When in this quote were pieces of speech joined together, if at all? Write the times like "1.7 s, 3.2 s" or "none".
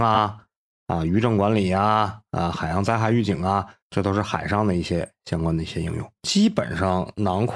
3.8 s, 6.2 s